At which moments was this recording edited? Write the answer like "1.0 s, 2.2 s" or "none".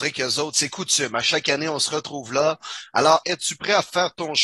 3.2 s